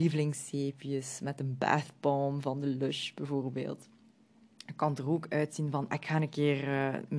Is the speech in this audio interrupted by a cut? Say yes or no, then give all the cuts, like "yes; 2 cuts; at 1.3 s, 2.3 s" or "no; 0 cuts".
yes; 1 cut; at 5.9 s